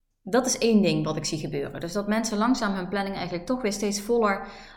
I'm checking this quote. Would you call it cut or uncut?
uncut